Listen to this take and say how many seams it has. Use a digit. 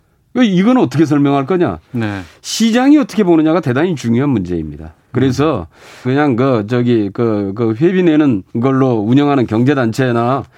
2